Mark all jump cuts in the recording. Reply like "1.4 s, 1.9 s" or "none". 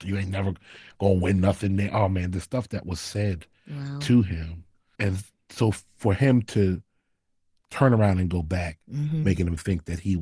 4.9 s, 9.2 s